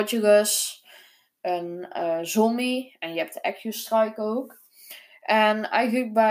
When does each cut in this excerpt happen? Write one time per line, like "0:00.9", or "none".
none